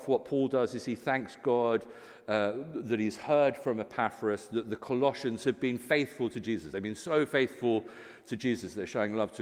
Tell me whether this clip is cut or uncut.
uncut